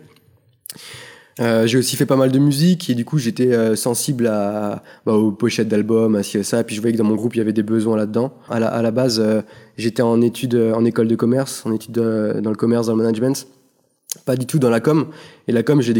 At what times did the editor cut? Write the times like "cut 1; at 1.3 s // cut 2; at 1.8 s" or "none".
cut 1; at 8.5 s